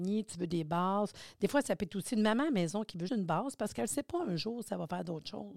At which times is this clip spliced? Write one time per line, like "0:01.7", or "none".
0:03.1